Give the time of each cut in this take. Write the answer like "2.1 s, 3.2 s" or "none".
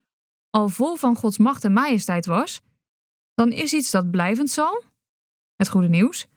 none

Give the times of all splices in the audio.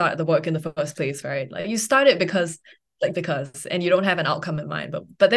1.2 s, 3.1 s

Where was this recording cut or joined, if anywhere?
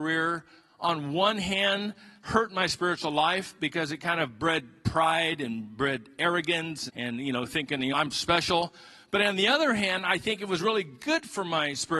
6.9 s, 7.9 s

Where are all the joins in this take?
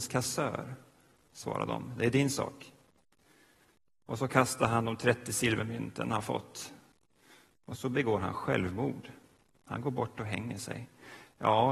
1.2 s

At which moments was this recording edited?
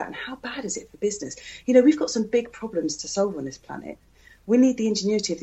none

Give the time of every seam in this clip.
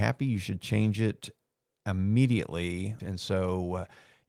3.0 s

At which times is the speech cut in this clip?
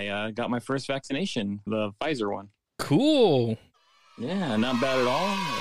1.7 s

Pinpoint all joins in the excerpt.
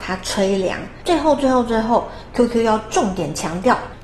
1.0 s

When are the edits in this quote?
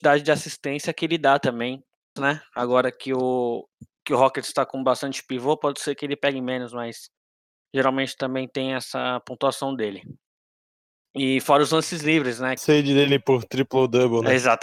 2.2 s, 12.6 s

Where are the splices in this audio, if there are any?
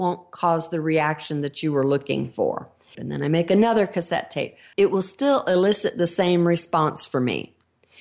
2.9 s, 4.7 s

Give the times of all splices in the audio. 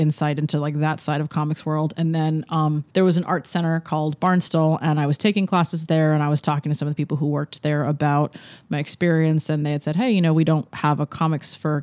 2.9 s

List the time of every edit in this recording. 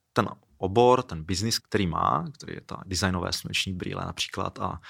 1.6 s, 2.8 s

